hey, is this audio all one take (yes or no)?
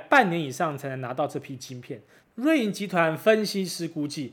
no